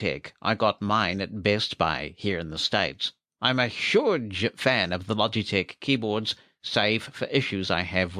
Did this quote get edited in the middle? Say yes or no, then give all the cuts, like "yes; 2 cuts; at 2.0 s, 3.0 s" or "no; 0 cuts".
no; 0 cuts